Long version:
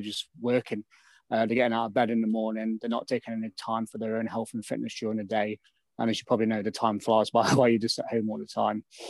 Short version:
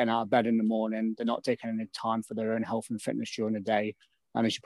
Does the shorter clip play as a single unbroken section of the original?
yes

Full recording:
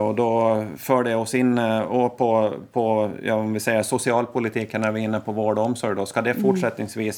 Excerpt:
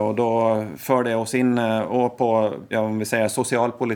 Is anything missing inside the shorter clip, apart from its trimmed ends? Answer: yes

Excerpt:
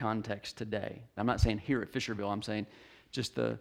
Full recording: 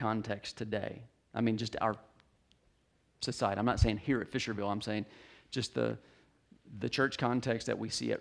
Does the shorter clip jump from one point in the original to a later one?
yes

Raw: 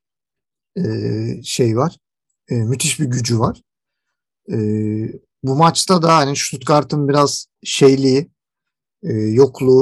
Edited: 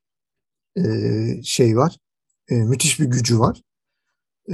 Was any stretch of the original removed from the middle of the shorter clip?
no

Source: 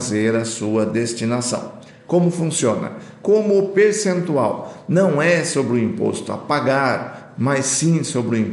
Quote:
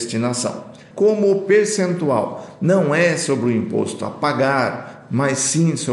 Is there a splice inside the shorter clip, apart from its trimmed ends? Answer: yes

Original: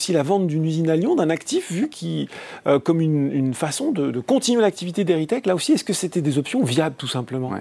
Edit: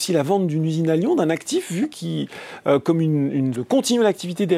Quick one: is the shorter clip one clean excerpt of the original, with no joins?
no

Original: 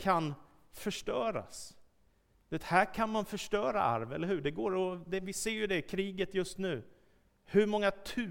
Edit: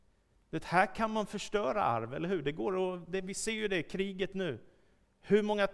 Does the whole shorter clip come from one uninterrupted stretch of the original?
no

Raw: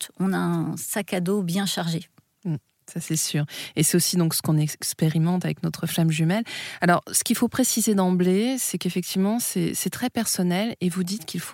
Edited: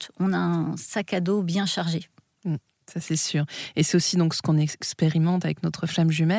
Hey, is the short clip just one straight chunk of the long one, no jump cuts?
yes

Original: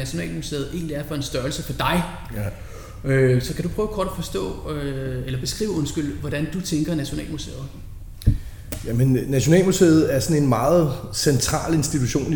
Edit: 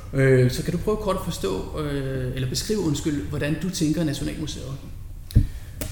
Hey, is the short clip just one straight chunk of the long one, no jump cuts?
yes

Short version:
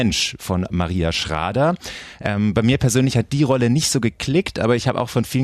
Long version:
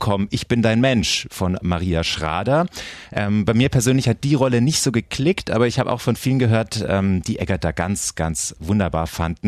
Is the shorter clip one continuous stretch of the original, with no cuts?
yes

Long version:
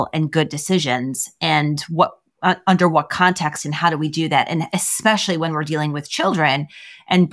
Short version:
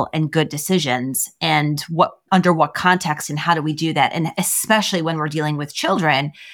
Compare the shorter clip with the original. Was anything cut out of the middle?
yes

